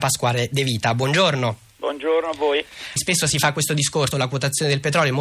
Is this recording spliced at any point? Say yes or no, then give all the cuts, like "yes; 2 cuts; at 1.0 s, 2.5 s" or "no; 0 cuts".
yes; 2 cuts; at 3.0 s, 4.1 s